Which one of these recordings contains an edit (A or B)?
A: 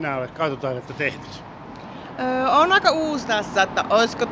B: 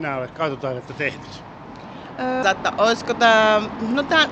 B